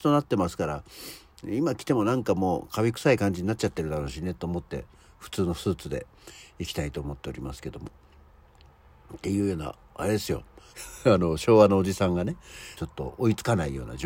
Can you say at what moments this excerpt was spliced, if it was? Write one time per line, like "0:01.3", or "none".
0:10.7
0:12.8